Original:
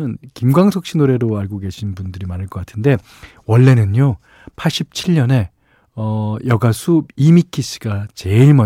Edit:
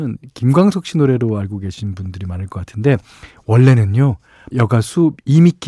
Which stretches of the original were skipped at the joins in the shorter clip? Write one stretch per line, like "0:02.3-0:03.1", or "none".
0:04.5-0:06.4